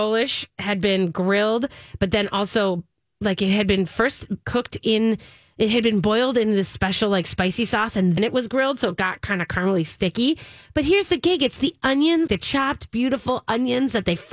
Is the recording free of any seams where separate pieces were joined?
no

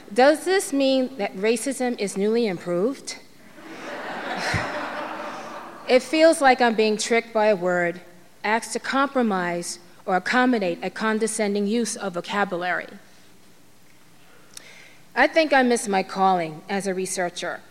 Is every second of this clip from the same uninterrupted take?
yes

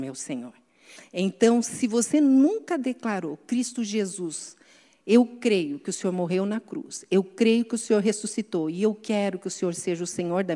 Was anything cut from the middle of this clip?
yes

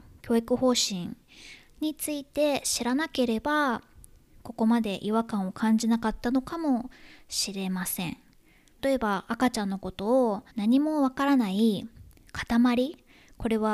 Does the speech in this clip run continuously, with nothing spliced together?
no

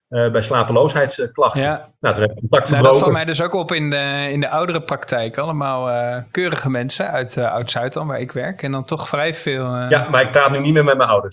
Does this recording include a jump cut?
no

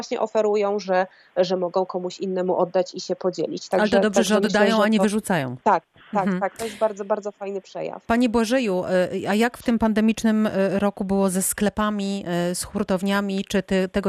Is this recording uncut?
yes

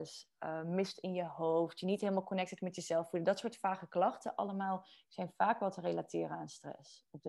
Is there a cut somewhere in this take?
no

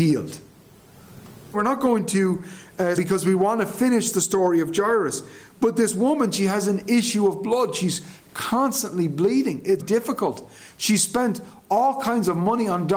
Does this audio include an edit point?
yes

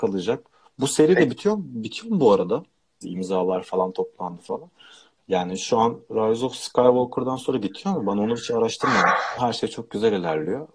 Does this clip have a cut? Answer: yes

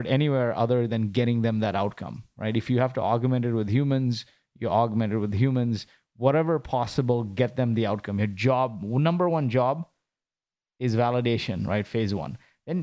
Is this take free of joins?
yes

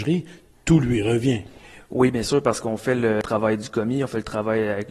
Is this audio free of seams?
yes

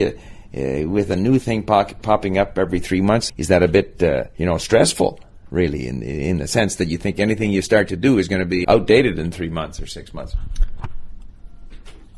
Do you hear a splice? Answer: yes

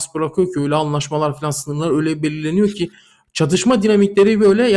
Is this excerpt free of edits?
yes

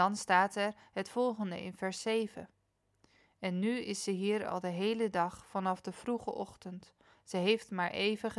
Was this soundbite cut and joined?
no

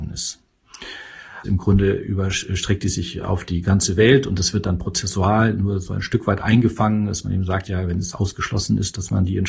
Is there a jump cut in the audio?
yes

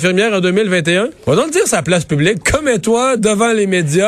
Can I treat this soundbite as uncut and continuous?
no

